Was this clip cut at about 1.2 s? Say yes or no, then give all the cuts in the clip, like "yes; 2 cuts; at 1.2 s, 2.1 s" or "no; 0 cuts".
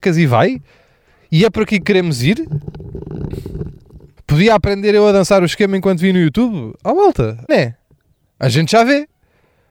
no; 2 cuts; at 4.2 s, 7.5 s